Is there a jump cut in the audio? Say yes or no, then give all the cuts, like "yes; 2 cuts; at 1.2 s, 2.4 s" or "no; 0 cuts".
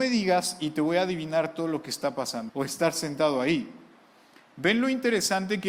yes; 1 cut; at 2.5 s